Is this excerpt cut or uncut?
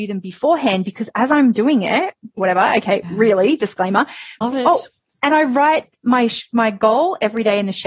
cut